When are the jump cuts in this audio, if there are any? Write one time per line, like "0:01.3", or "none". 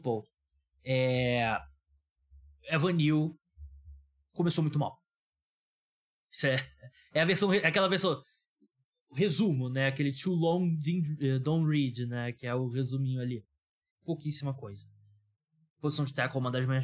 0:13.9